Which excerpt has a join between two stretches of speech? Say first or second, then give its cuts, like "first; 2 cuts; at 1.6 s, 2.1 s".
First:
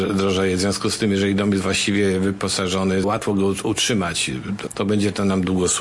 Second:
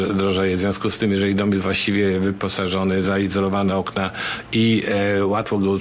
first; 2 cuts; at 3.0 s, 4.7 s